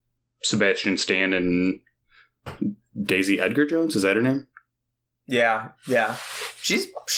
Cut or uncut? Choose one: uncut